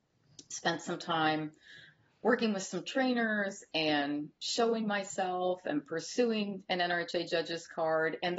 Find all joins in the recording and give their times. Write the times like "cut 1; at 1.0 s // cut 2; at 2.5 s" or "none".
none